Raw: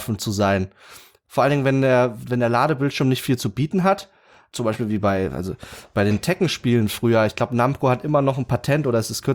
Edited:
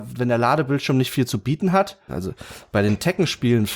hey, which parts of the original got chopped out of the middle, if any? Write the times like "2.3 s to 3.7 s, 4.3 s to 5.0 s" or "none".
4.2 s to 5.3 s